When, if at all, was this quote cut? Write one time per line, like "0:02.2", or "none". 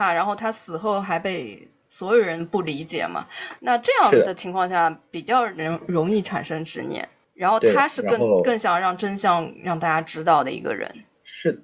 none